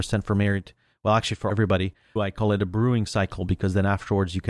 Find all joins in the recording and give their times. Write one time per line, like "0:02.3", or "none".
0:02.2